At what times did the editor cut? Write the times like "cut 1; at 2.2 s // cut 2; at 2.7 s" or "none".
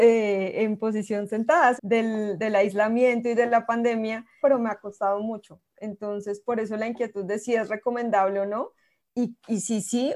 cut 1; at 1.8 s // cut 2; at 4.4 s